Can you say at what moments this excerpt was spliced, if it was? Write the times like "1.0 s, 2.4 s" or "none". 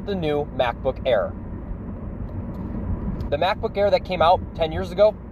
3.3 s